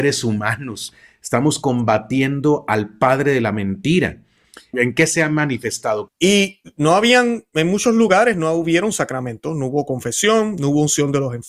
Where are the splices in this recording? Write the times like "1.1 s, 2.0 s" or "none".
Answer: 4.7 s, 6.1 s

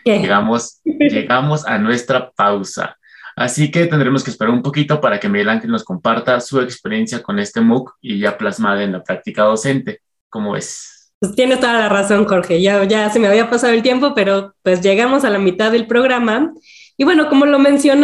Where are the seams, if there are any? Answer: none

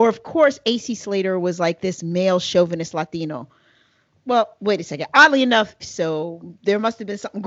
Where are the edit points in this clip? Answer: 5.8 s

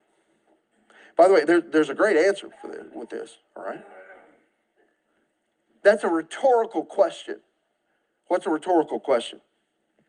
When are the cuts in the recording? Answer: none

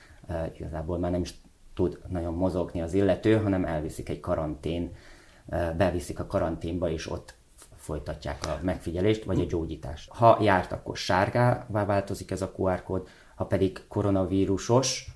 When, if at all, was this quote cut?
10.1 s

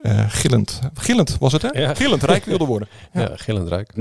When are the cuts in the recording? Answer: 1.9 s

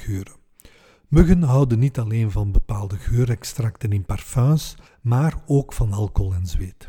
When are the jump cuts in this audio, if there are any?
4.9 s

